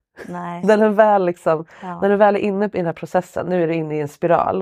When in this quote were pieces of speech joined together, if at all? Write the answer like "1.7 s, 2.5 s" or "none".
none